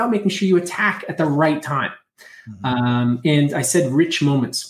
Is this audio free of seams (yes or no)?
yes